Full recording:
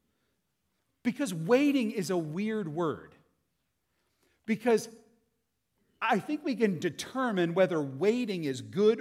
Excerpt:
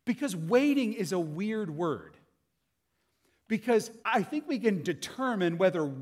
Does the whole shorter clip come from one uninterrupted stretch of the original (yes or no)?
no